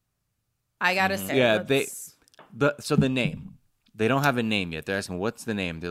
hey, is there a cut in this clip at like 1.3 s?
yes; 1 cut; at 1.3 s

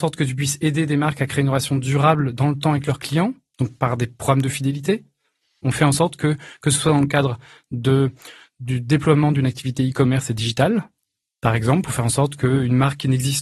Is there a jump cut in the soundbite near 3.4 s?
no; 1 cut; at 5.6 s

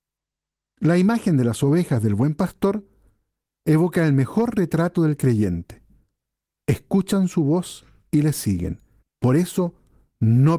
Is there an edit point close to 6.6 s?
no; 1 cut; at 9.0 s

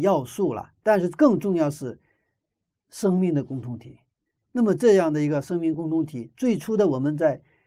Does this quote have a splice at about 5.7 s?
yes; 2 cuts; at 4.4 s, 5.7 s

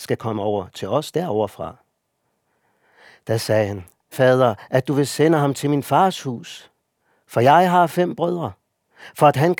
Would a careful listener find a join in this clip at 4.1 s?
yes; 1 cut; at 4.1 s

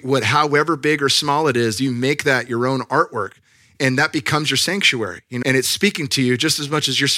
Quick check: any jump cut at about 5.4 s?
yes; 1 cut; at 5.4 s

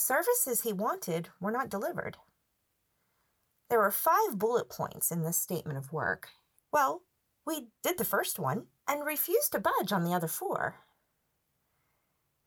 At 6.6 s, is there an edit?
yes; 2 cuts; at 6.6 s, 8.8 s

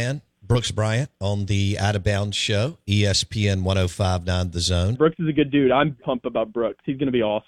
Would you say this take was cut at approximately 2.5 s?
no; 2 cuts; at 4.9 s, 6.0 s

